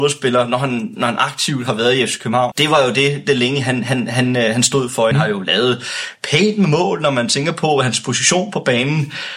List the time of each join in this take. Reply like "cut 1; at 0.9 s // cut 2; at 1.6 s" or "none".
cut 1; at 2.5 s // cut 2; at 5.1 s